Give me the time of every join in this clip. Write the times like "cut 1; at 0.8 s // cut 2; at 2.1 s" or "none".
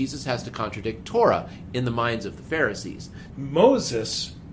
cut 1; at 3.3 s